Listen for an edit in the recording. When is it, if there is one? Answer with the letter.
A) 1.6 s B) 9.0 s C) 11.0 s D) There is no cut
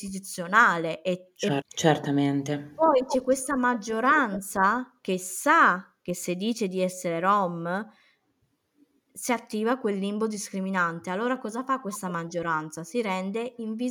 A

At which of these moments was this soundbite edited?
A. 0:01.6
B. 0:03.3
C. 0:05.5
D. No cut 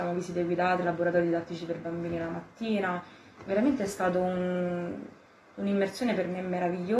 D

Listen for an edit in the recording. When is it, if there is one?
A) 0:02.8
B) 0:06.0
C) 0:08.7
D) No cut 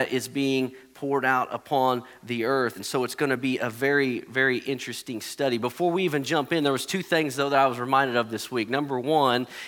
A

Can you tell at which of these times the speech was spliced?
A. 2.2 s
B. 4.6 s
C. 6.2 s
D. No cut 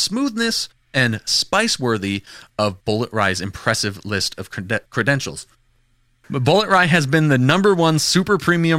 C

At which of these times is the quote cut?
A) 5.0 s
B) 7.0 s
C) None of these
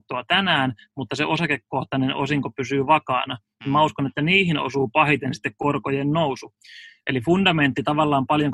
B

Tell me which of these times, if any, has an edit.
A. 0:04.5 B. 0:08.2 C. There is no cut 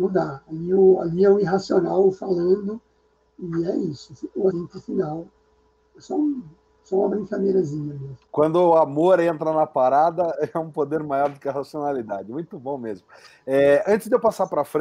A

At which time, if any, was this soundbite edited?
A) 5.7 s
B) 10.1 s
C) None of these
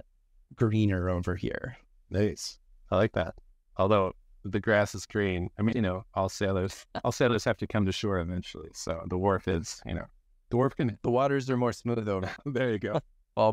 A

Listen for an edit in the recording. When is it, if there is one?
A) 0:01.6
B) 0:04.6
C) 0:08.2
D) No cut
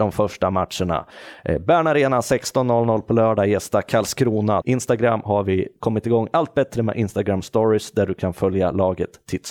B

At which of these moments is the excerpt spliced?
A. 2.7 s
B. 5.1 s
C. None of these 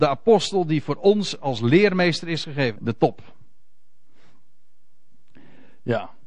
A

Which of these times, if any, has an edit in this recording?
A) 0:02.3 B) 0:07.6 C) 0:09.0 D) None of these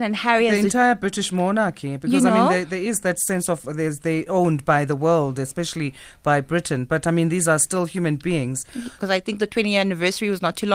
C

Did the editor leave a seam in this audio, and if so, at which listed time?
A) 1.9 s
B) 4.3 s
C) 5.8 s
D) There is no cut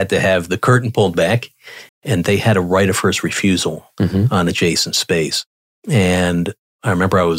A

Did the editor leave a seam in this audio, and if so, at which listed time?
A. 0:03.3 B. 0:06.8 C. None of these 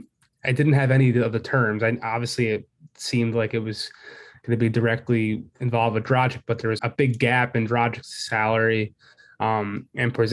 B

